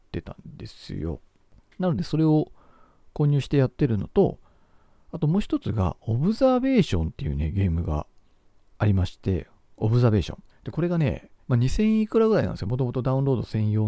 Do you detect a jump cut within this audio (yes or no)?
yes